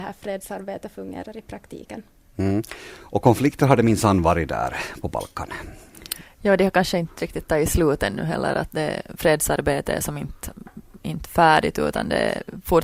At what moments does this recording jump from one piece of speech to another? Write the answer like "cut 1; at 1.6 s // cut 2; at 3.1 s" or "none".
none